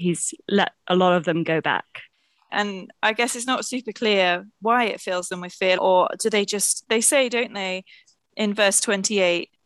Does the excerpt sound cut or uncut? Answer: cut